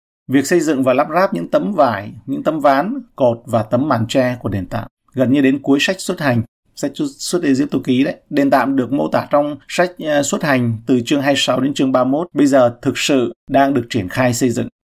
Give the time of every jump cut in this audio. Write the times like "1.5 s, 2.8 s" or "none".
4.9 s